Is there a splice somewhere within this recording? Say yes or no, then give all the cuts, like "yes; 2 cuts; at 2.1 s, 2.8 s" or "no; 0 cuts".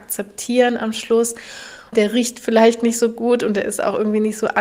yes; 1 cut; at 1.9 s